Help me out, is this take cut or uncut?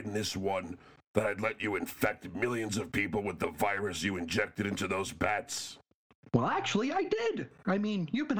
uncut